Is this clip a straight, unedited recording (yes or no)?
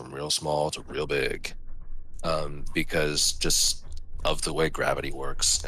yes